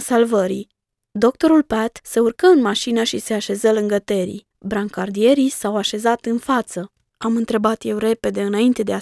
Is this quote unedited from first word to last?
no; 2 cuts; at 4.5 s, 7.1 s

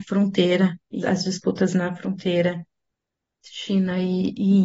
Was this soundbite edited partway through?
yes; 1 cut; at 1.0 s

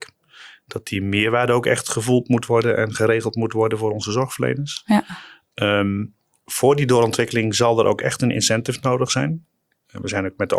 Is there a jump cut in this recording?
no; 0 cuts

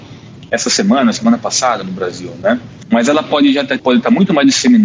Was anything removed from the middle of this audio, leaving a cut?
yes; 1 cut; at 3.8 s

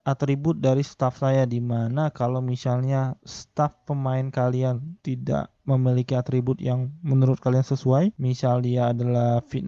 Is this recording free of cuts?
yes; 0 cuts

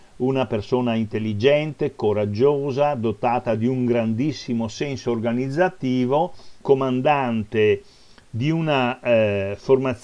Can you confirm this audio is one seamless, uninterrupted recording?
no; 1 cut; at 6.6 s

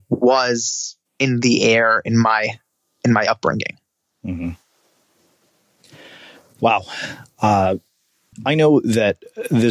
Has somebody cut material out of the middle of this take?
yes; 1 cut; at 8.3 s

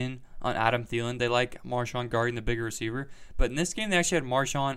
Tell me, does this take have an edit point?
no; 0 cuts

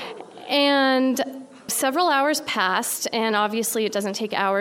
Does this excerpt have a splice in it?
yes; 1 cut; at 1.7 s

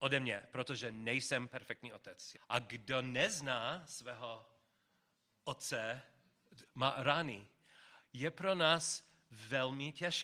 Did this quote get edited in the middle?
yes; 2 cuts; at 2.3 s, 6.6 s

